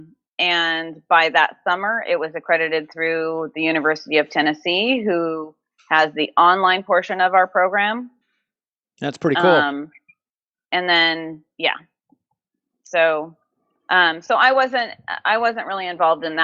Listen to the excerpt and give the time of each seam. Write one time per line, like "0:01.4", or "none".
none